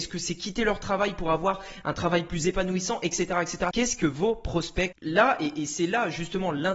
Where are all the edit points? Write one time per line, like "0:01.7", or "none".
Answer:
0:03.7
0:04.9